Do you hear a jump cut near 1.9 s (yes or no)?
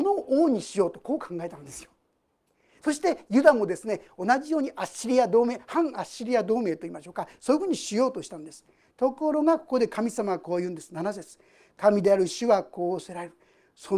no